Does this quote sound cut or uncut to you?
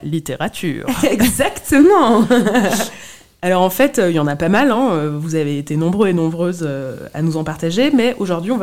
uncut